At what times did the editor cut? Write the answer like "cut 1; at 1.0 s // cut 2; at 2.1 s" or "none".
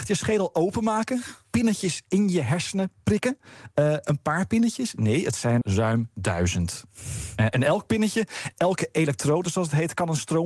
cut 1; at 5.6 s